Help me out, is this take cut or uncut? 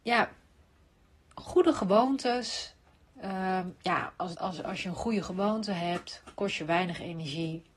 cut